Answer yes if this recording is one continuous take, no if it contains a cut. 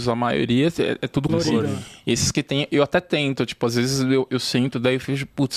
no